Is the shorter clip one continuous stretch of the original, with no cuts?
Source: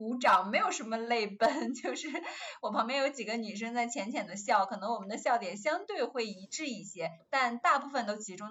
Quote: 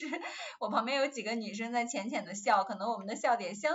yes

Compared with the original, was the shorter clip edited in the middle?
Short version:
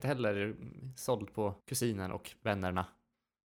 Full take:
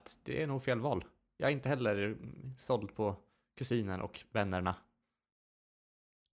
yes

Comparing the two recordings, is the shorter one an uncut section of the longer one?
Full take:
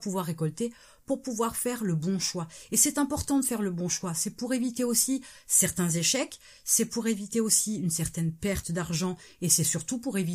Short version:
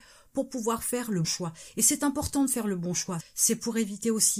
no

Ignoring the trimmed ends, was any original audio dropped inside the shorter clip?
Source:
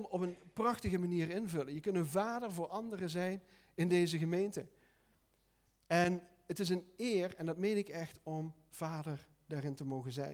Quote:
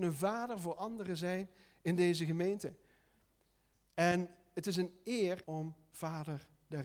yes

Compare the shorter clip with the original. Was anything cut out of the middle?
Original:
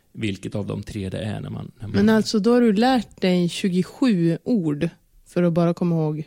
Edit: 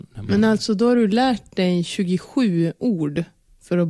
no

